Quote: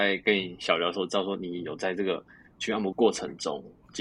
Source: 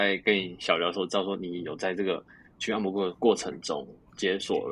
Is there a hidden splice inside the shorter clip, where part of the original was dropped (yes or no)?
yes